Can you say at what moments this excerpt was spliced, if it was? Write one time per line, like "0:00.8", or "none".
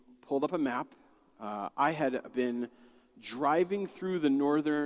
none